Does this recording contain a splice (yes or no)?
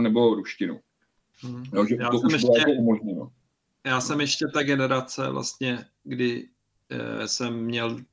no